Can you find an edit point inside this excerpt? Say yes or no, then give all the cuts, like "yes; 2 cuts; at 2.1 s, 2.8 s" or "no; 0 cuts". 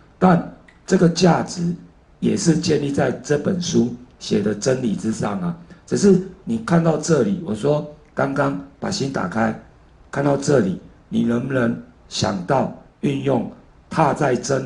no; 0 cuts